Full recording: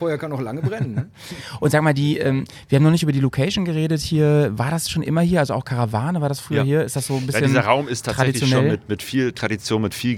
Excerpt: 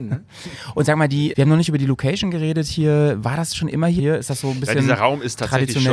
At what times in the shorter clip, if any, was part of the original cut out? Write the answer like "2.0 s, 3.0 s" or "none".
1.3 s, 4.0 s